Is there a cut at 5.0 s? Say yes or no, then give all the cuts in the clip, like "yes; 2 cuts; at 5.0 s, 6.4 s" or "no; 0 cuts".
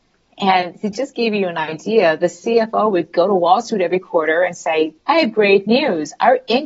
yes; 1 cut; at 5.0 s